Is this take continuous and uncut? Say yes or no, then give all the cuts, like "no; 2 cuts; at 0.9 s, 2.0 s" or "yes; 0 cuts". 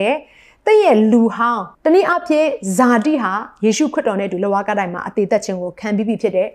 no; 1 cut; at 1.7 s